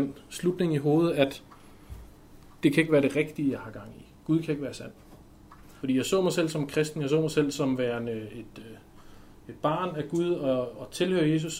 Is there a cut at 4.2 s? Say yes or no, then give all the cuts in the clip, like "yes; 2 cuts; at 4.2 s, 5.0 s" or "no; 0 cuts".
no; 1 cut; at 5.8 s